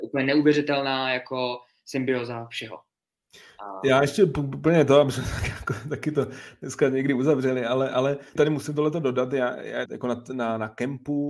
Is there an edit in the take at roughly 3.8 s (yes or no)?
no